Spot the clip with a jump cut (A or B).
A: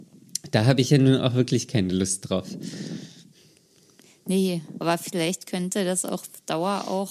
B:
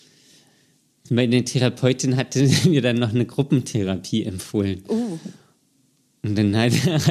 A